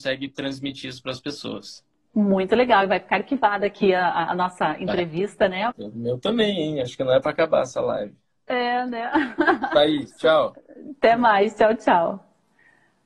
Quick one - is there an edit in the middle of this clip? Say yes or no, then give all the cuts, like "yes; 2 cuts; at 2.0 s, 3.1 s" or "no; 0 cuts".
yes; 1 cut; at 5.7 s